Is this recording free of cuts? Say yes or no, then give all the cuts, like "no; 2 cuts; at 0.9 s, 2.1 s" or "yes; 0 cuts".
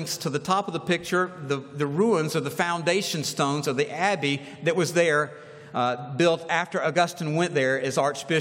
yes; 0 cuts